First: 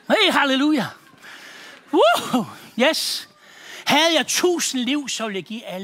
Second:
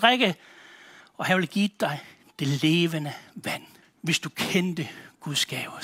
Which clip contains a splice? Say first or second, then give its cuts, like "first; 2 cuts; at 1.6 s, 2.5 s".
second; 2 cuts; at 1.0 s, 3.8 s